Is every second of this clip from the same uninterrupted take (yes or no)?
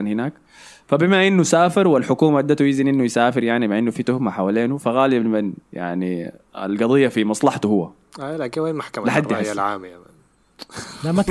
no